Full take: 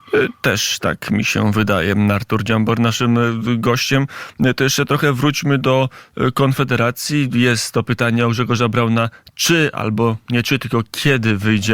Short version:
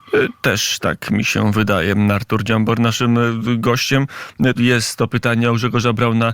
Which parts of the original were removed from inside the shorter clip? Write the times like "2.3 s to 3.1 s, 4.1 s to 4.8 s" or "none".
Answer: 4.5 s to 7.3 s